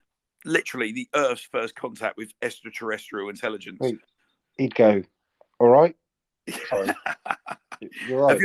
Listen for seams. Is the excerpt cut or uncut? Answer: uncut